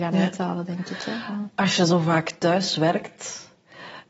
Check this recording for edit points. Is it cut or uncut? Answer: uncut